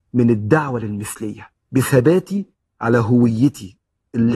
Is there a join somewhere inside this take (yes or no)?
yes